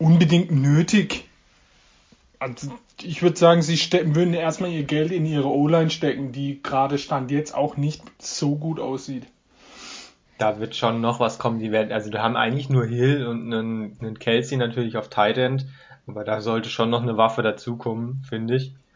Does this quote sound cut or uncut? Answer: cut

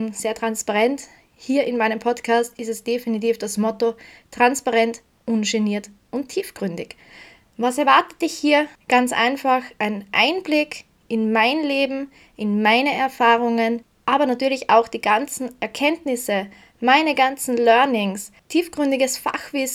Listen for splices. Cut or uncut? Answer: uncut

